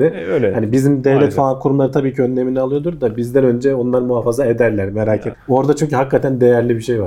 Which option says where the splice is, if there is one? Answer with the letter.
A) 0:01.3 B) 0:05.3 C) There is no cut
B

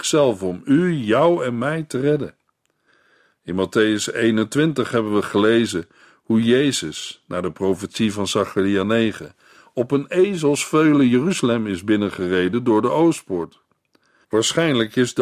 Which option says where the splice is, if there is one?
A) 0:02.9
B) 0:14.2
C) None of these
B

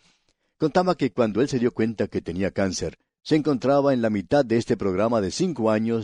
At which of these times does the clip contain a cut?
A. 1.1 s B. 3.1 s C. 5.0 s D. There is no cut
B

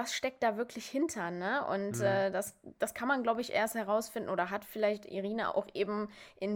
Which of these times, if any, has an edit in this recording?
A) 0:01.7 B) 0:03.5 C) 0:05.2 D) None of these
D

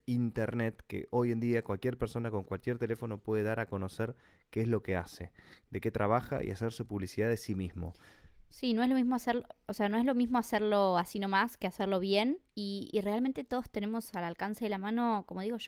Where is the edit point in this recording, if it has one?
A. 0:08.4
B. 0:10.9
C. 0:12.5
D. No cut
C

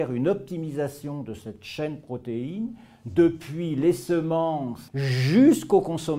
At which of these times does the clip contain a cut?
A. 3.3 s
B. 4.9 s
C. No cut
B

